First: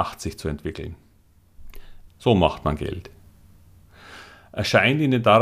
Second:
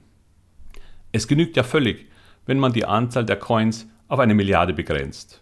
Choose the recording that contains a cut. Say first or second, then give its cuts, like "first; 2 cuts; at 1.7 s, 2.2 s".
first; 1 cut; at 2.1 s